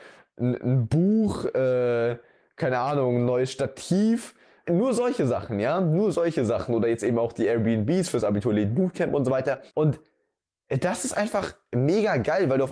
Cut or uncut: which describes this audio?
uncut